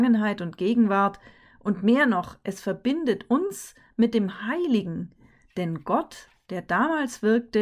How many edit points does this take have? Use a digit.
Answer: 0